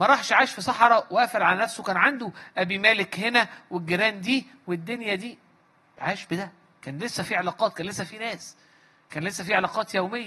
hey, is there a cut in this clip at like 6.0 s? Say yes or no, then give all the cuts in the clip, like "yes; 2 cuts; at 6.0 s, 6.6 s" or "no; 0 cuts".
yes; 1 cut; at 6.0 s